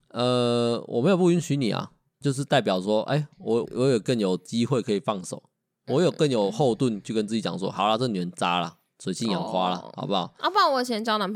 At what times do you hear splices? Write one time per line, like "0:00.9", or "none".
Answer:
0:02.2
0:03.7